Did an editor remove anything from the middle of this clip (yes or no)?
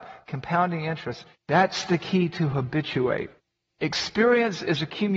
yes